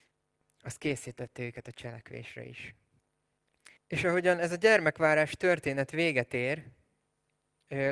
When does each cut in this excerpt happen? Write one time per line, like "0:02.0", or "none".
0:03.8